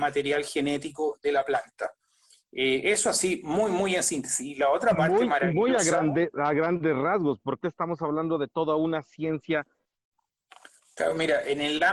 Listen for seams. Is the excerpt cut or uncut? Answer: uncut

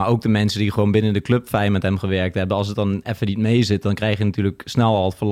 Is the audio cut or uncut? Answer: uncut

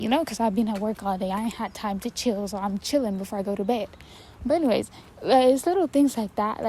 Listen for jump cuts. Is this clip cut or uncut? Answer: uncut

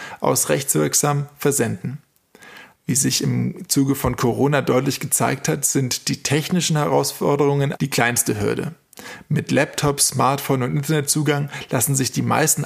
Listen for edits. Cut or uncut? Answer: cut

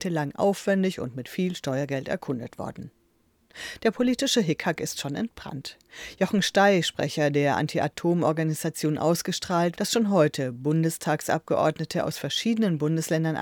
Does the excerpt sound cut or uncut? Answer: cut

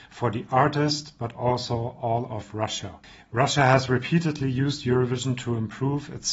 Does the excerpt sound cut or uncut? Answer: uncut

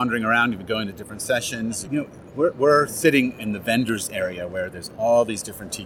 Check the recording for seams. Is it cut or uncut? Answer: cut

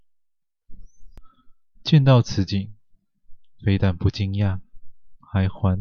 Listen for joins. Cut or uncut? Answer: cut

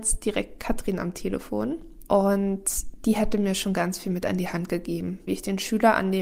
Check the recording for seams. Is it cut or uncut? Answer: cut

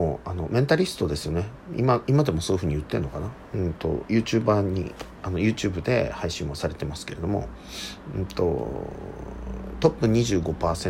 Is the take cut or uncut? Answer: uncut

